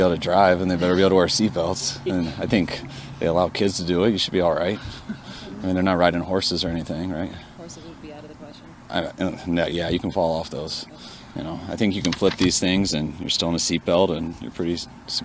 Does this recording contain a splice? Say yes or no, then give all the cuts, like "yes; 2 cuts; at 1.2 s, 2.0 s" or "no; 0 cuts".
no; 0 cuts